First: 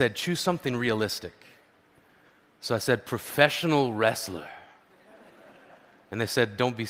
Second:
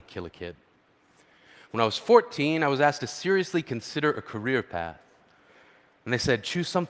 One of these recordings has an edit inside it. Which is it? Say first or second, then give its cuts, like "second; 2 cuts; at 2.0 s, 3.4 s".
second; 1 cut; at 5.9 s